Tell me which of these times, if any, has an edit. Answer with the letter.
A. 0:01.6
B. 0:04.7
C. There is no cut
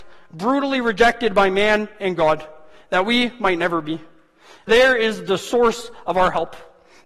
B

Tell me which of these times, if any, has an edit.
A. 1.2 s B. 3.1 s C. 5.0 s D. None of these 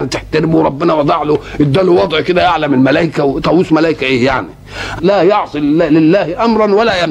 C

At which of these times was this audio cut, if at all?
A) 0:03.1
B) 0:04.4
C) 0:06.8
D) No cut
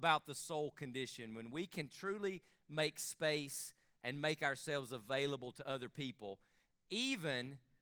D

